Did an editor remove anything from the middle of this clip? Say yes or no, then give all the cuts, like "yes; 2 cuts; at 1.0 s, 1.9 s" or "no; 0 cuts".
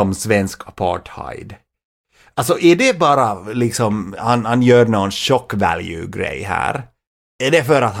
no; 0 cuts